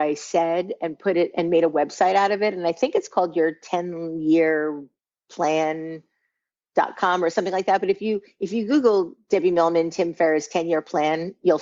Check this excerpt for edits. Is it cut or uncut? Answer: uncut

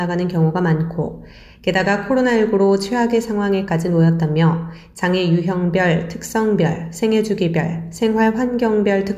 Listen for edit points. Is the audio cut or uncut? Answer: uncut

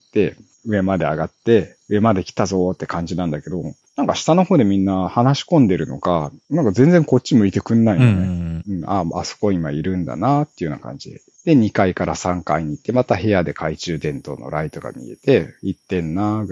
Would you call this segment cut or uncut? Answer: cut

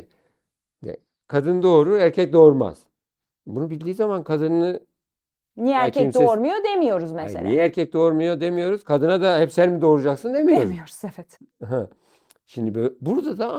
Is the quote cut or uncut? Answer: uncut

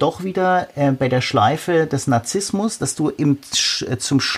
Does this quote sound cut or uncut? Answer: uncut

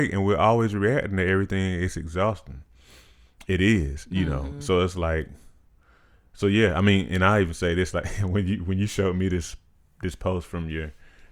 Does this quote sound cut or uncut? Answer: uncut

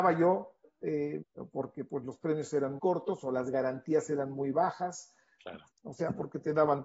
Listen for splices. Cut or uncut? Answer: cut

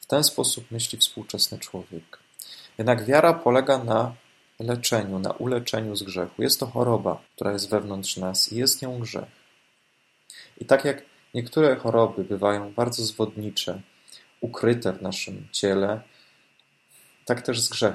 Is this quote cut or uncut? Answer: cut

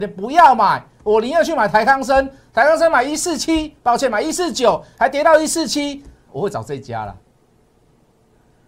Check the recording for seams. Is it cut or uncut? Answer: cut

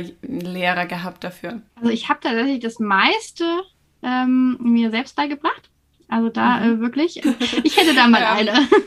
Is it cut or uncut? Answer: cut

